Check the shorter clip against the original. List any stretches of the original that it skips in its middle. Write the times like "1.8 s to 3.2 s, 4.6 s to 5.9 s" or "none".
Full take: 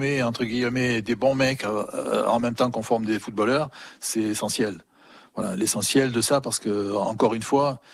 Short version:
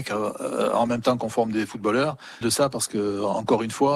3.9 s to 6.1 s